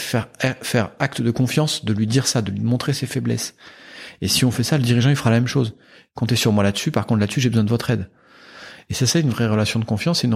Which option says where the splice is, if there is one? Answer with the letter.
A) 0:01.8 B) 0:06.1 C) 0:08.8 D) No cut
D